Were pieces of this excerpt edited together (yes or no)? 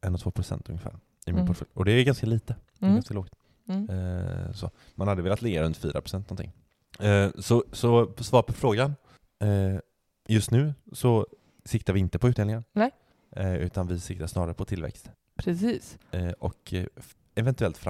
no